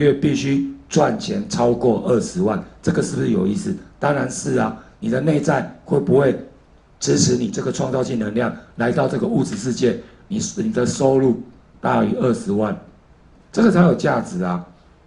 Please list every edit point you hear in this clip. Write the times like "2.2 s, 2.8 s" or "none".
none